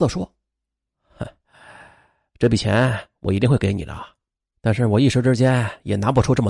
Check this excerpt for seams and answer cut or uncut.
uncut